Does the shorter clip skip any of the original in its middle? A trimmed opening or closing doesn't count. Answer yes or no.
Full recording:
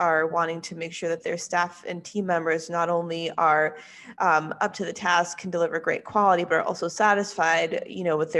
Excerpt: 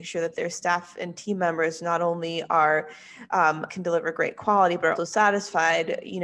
yes